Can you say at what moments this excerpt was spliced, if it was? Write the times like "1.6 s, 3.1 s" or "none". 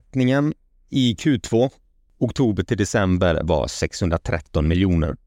none